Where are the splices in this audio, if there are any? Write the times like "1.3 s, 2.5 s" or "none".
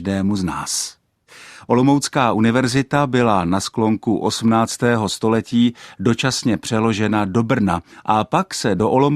none